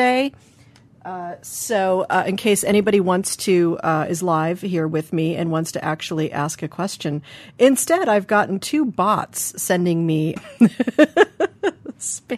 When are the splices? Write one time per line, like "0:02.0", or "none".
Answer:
0:10.4

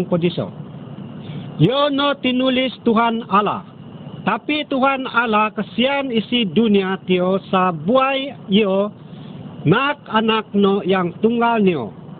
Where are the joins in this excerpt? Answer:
none

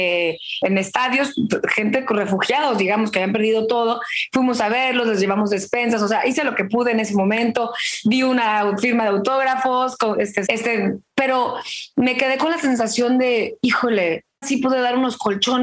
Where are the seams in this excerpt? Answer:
0:10.5
0:14.4

